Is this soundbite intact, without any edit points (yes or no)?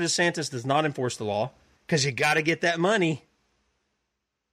no